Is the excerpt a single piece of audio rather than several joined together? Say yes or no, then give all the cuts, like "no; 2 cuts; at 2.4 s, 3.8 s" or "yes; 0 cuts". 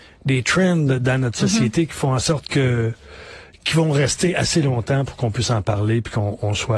yes; 0 cuts